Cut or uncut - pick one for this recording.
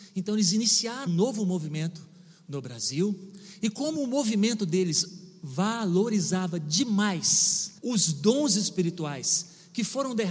cut